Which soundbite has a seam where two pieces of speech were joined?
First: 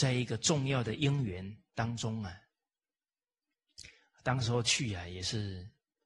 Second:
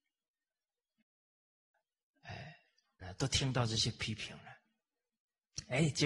second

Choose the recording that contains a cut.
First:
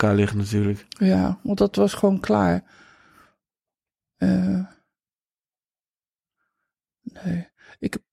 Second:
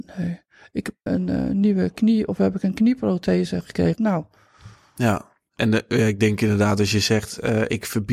second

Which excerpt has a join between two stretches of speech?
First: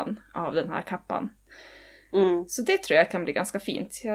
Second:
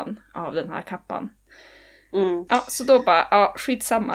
second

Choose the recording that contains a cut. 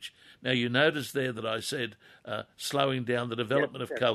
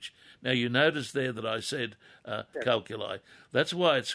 second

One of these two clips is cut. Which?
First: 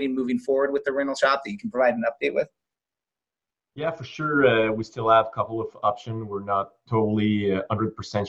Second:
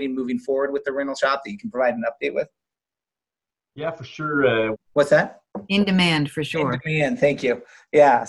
second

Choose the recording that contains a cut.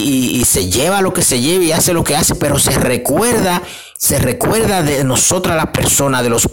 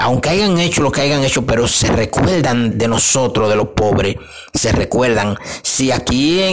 second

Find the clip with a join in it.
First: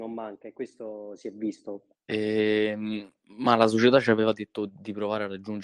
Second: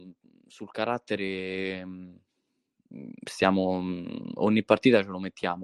first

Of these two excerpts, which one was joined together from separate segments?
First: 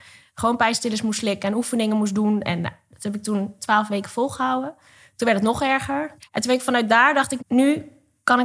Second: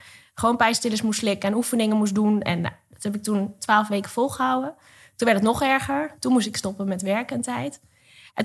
first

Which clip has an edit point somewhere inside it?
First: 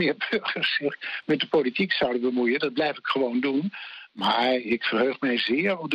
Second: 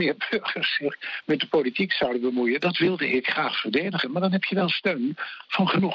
second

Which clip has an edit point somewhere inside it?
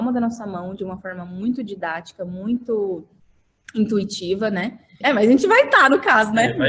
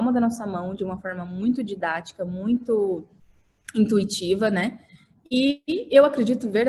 first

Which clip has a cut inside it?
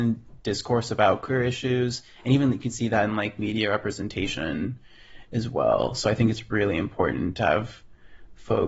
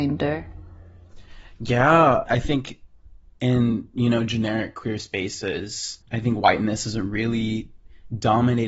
second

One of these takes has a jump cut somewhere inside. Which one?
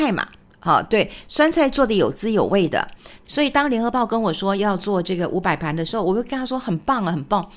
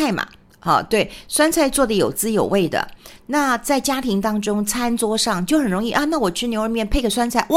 first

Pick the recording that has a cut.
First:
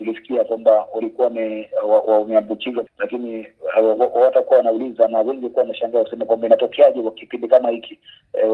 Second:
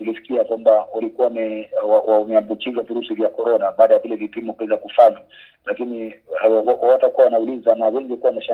first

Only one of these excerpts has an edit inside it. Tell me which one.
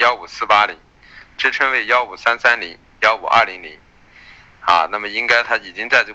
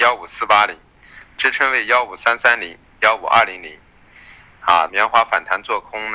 second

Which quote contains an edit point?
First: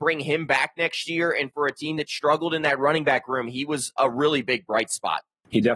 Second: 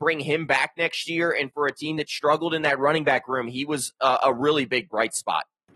first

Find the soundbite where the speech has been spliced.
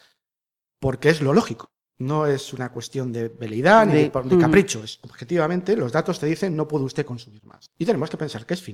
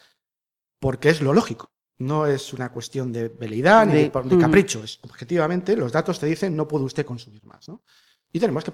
first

